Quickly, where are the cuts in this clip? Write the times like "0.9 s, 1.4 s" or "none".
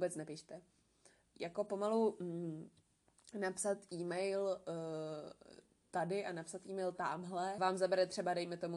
1.3 s, 7.6 s